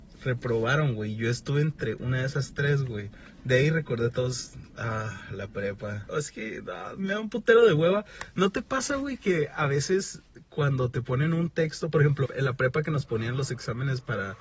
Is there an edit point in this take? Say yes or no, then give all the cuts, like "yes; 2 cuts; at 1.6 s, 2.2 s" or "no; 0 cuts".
yes; 2 cuts; at 6.1 s, 12.3 s